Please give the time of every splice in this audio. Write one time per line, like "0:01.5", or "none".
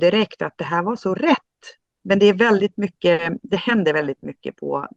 0:02.0